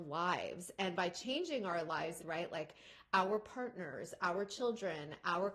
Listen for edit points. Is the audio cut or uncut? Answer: cut